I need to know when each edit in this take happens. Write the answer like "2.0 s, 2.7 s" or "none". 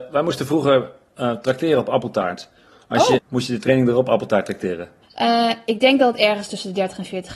3.2 s, 5.0 s